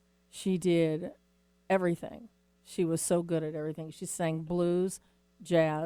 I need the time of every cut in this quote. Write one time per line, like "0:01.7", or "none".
none